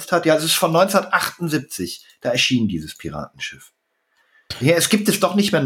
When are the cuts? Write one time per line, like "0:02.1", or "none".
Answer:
none